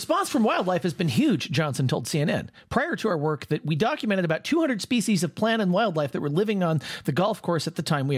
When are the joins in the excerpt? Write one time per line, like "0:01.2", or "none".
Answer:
none